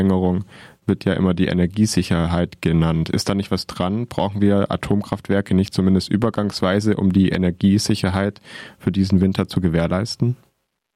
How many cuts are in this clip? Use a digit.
0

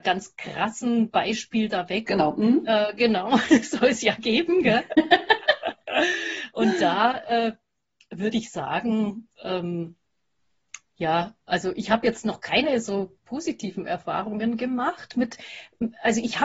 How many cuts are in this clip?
1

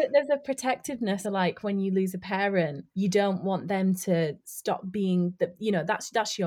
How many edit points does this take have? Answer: 2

